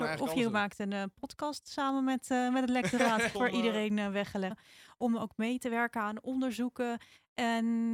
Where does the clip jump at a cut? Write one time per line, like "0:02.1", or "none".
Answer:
0:03.3
0:04.5

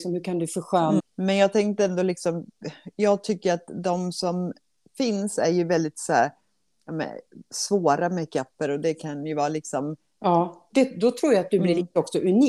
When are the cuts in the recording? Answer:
0:01.0
0:10.7

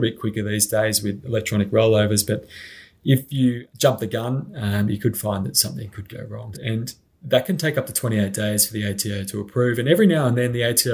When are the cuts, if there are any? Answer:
0:06.5

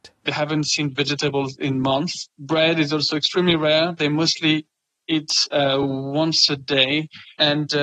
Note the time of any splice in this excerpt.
none

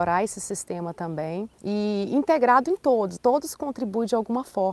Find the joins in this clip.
0:01.5
0:03.2

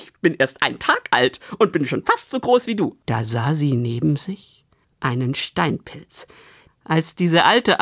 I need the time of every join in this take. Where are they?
0:03.0
0:04.8
0:06.7

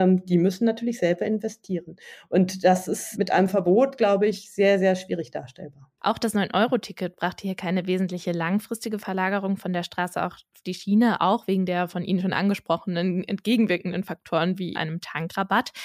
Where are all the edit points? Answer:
0:06.0
0:14.7

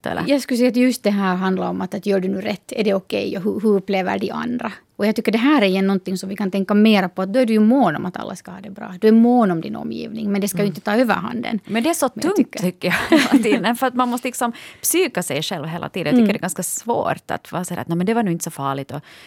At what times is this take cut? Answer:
none

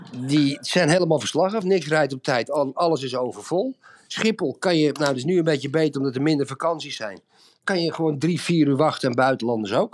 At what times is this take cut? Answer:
none

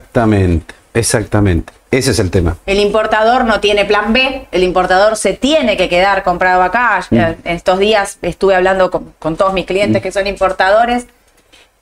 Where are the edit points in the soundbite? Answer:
none

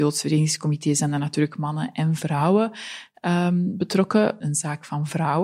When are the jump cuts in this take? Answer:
0:04.4

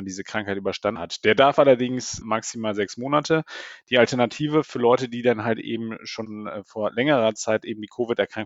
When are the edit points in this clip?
0:02.2

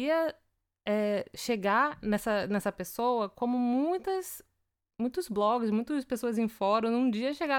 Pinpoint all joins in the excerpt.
none

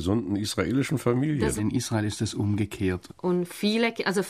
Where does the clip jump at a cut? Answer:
0:01.6
0:03.1

